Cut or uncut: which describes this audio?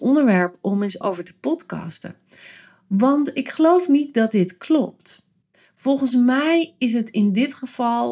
cut